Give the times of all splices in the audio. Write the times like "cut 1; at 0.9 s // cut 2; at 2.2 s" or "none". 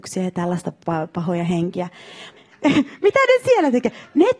cut 1; at 2.4 s